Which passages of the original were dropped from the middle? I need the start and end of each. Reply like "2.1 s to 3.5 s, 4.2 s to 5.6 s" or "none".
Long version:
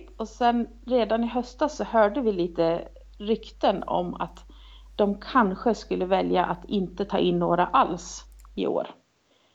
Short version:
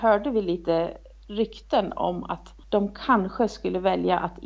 4.5 s to 4.9 s